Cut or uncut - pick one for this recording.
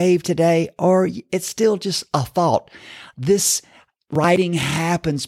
cut